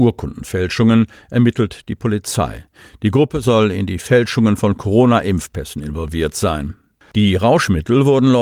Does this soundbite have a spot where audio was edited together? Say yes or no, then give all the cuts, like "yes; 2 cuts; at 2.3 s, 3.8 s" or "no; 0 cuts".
yes; 1 cut; at 7.0 s